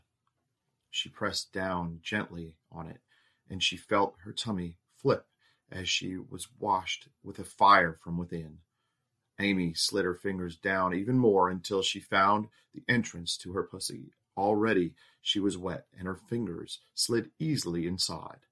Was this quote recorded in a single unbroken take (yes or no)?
yes